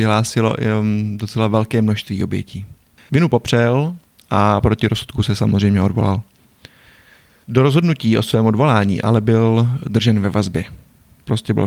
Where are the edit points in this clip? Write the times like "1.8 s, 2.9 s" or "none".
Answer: 3.1 s